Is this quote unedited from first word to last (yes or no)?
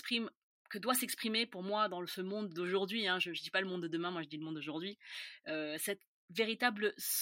yes